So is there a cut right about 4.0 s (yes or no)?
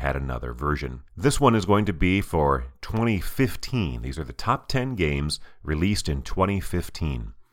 no